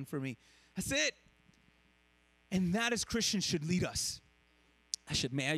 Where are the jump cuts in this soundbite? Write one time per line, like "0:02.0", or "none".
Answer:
none